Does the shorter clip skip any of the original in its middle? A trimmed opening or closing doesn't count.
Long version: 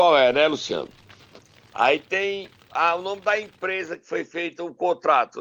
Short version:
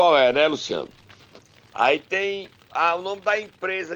no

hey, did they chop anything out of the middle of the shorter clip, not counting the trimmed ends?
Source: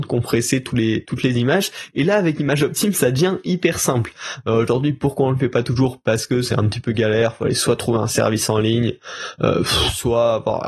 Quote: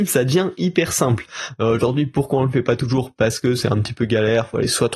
no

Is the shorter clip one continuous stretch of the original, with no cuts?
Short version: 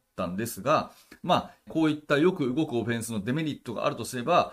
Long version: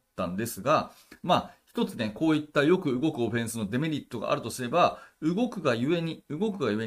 no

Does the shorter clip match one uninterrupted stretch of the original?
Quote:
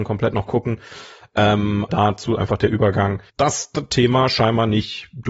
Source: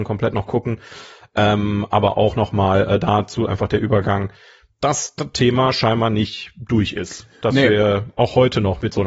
no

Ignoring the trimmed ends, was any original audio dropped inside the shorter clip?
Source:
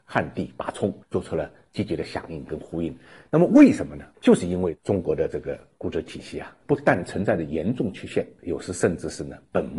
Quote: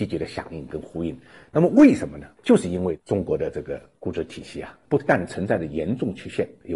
no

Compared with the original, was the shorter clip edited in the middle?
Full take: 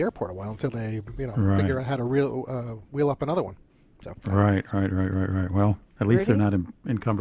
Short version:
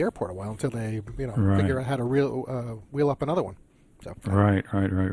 no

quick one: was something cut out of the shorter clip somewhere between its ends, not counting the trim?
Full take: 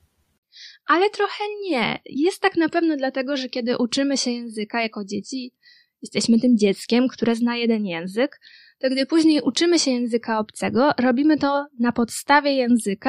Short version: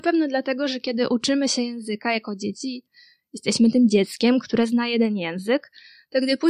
no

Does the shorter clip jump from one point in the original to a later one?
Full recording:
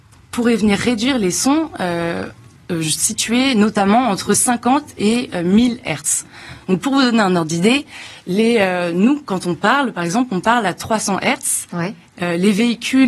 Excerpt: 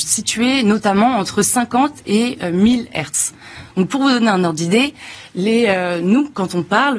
no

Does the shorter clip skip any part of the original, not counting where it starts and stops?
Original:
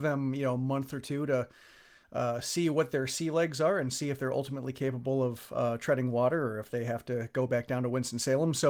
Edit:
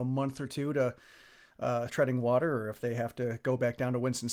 yes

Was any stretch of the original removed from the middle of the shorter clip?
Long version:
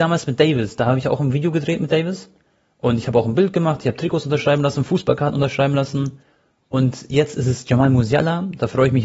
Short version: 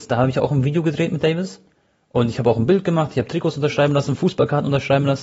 no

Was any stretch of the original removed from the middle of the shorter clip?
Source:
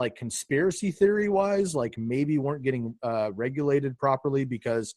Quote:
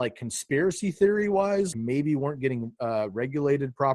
yes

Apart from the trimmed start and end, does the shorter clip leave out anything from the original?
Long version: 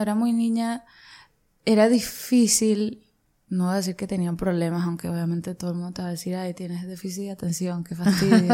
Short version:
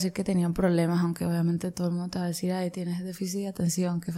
no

